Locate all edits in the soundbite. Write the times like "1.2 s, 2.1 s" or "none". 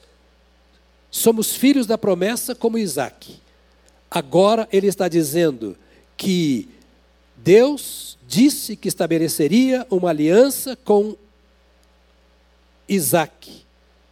none